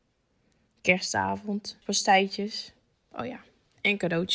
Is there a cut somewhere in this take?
yes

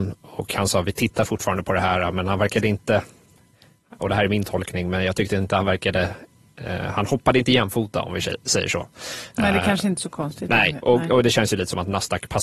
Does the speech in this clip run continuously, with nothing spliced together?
yes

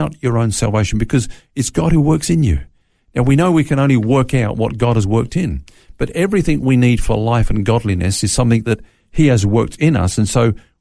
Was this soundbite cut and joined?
no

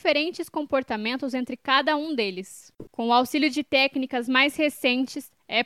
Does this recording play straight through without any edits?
no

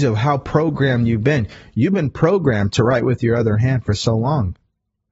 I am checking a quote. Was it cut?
no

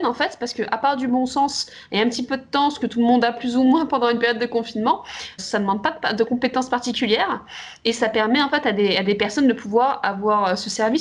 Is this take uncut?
no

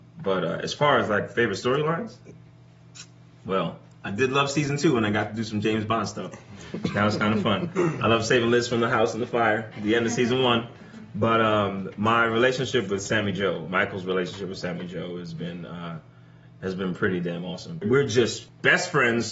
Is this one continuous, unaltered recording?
yes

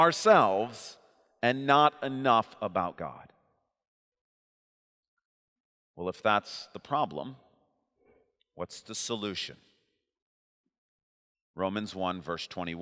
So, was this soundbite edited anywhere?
no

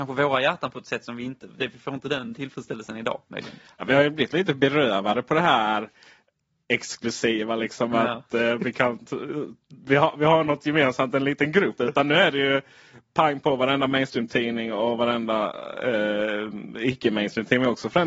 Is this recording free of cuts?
no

